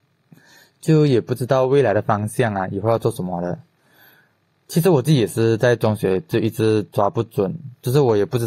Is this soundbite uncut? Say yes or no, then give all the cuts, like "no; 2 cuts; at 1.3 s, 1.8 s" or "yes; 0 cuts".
yes; 0 cuts